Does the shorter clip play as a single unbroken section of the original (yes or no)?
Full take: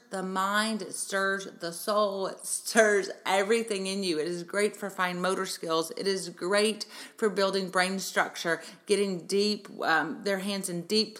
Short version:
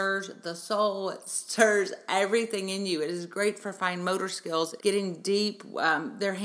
no